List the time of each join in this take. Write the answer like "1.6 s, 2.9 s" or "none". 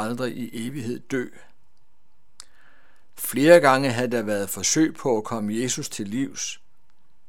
3.2 s

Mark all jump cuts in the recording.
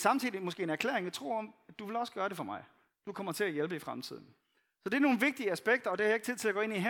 none

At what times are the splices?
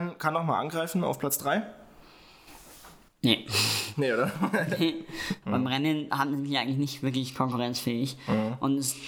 5.4 s

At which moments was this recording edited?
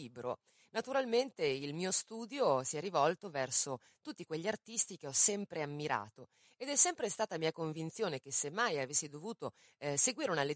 none

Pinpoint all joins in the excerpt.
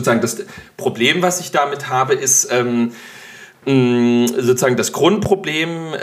none

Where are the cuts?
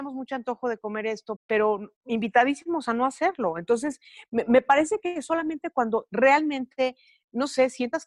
1.4 s

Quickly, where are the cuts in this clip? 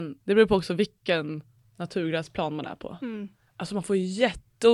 none

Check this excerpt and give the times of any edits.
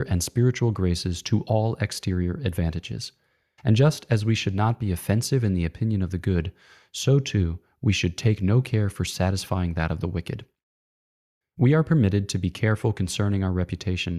3.6 s, 11.4 s

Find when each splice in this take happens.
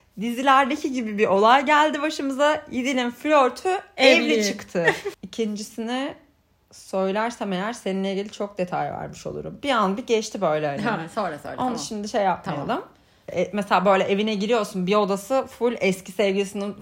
5.1 s, 13.3 s

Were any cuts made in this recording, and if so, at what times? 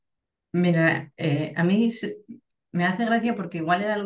none

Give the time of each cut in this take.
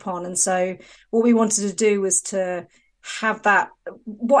none

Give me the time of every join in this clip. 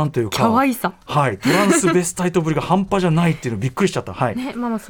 none

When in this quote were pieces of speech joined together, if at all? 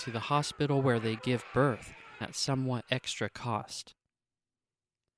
2.2 s

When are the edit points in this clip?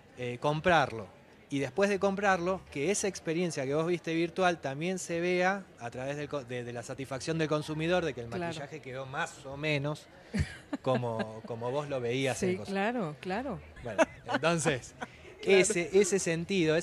5.7 s, 13.8 s

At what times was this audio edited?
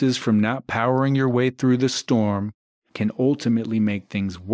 none

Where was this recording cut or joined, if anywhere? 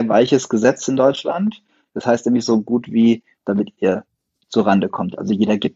3.4 s

